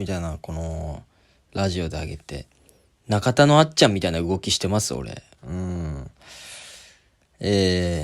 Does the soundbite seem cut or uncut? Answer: cut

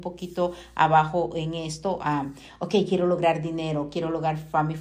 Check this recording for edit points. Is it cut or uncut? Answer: uncut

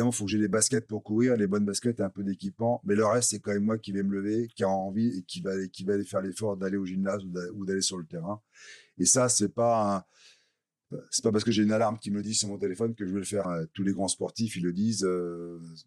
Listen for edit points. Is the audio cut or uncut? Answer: cut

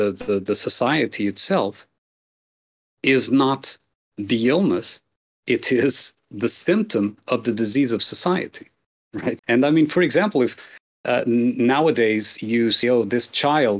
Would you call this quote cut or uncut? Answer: cut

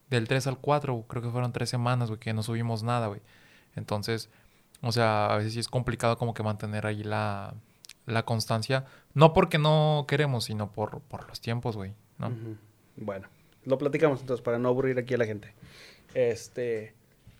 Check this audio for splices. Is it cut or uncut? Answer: uncut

